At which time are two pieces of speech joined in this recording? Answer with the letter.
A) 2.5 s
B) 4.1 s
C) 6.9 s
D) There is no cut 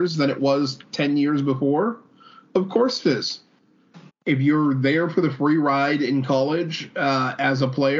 B